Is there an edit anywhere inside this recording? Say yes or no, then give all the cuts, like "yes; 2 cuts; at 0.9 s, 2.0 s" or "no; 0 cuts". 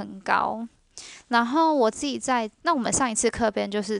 yes; 1 cut; at 2.6 s